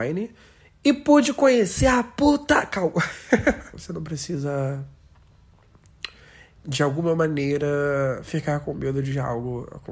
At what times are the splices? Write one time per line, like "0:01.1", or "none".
0:03.7

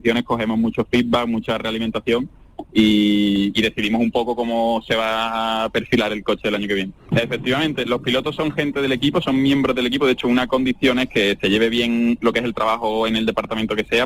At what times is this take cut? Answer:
0:07.1

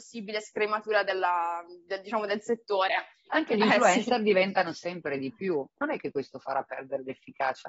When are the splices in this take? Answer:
0:03.3

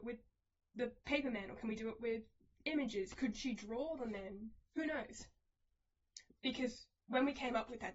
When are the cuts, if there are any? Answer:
0:01.0
0:06.3

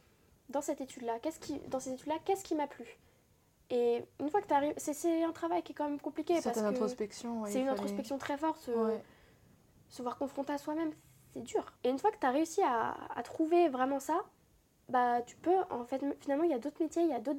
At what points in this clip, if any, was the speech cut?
0:11.8

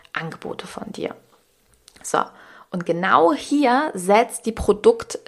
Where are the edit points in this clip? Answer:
none

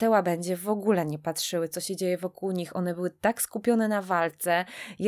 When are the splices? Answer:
none

